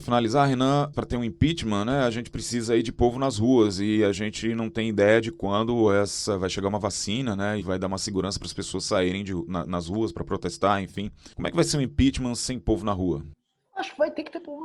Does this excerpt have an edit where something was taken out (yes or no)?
yes